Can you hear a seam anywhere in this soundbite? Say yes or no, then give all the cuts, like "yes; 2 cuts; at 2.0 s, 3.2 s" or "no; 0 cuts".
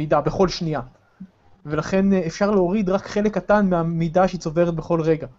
no; 0 cuts